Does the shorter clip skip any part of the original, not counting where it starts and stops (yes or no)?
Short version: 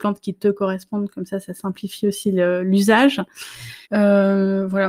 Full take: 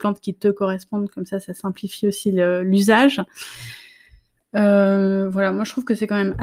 yes